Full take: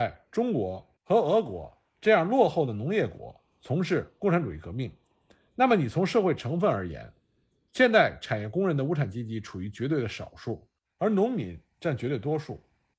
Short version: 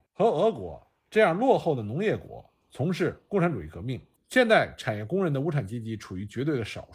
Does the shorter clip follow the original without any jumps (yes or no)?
no